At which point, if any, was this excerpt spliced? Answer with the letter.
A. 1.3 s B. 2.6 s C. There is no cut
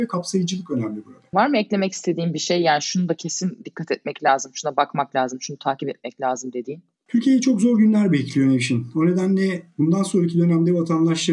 A